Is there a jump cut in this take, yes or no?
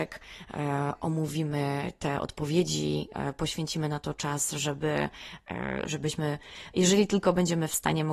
yes